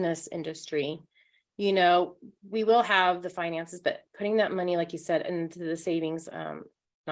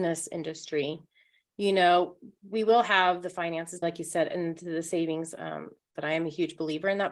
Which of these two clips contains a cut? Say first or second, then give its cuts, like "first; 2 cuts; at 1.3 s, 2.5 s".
second; 2 cuts; at 3.8 s, 6.0 s